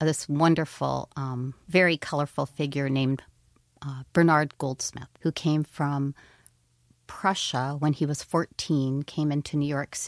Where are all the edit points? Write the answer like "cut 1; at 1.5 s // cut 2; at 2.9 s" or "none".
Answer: cut 1; at 5.2 s